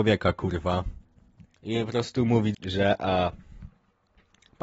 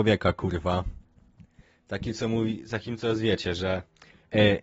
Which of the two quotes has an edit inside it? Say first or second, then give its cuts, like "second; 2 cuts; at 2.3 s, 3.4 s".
first; 2 cuts; at 1.5 s, 2.5 s